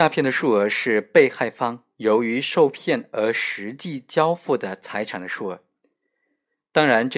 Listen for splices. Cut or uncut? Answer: uncut